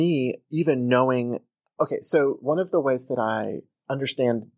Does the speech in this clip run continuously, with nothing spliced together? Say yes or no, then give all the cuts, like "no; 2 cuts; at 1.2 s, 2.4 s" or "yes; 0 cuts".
yes; 0 cuts